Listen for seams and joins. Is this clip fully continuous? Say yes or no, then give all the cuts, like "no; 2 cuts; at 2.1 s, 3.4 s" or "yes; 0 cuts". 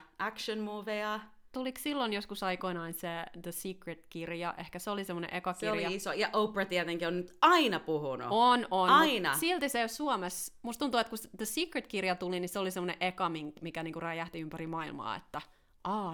yes; 0 cuts